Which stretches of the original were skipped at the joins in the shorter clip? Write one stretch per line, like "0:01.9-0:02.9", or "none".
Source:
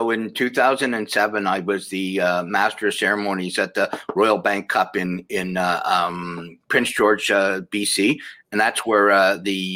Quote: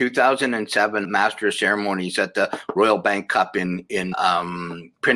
0:01.4-0:02.4
0:05.5-0:05.8